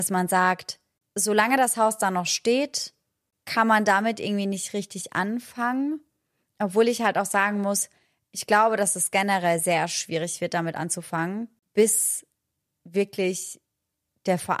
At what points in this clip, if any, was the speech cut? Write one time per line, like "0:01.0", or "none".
none